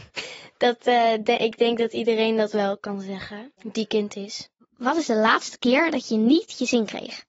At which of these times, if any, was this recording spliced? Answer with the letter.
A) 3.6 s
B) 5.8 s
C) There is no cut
A